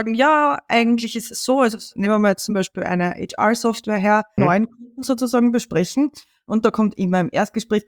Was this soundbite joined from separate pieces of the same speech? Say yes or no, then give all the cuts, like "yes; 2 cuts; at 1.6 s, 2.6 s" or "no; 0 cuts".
yes; 1 cut; at 4.4 s